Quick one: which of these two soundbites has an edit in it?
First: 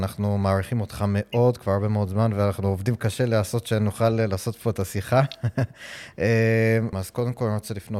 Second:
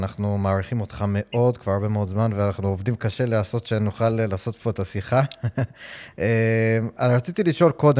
first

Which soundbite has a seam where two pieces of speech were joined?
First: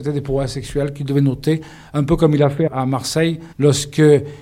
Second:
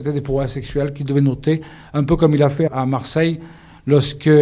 first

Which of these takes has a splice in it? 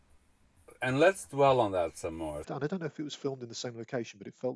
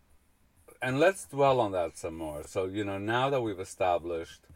first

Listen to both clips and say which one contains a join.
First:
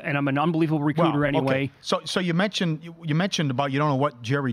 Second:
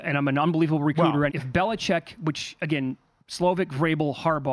second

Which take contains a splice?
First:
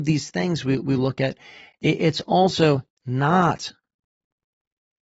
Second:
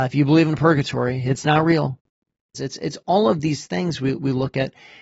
second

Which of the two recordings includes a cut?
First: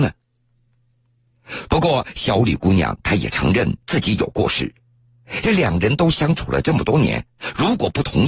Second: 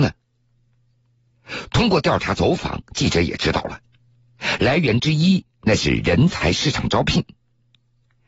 first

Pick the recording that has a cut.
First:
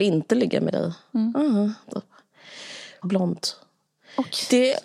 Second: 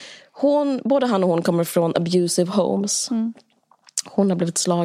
first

